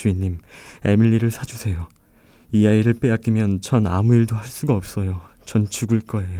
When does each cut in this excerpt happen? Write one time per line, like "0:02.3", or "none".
none